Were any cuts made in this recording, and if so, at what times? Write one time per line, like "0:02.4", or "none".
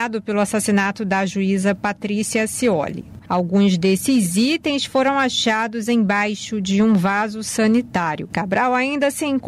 0:03.2
0:08.3